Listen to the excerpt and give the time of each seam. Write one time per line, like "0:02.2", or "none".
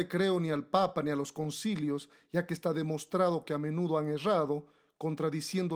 none